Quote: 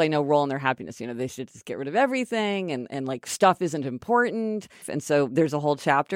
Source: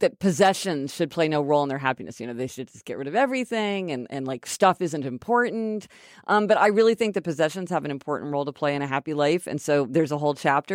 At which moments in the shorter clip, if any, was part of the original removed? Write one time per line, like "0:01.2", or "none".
0:04.8